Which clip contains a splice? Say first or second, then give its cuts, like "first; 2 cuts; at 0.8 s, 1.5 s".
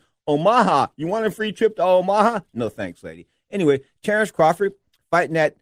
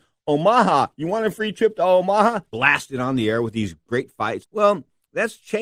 second; 2 cuts; at 2.5 s, 4.4 s